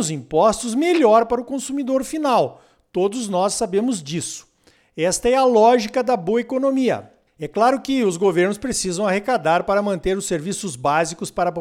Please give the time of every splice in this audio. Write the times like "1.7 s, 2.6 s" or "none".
none